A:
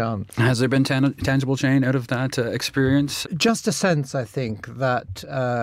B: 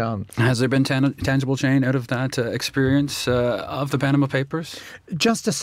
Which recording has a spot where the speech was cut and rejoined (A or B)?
A